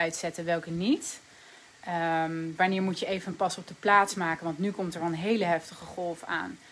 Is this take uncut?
yes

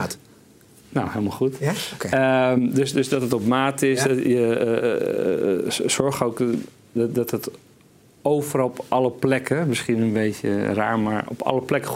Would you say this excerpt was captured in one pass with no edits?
yes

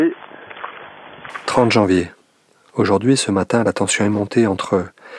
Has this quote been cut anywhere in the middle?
no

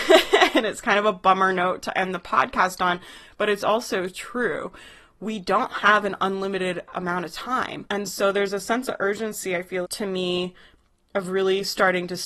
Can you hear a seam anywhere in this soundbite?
yes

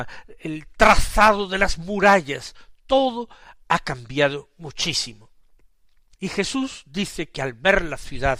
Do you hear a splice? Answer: yes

